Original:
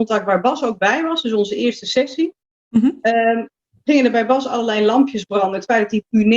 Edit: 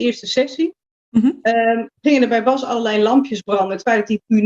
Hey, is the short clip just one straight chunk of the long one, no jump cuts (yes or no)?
no